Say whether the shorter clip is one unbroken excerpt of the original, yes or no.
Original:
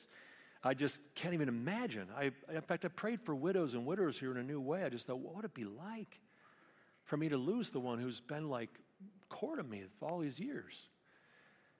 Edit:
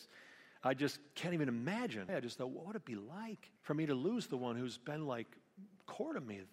no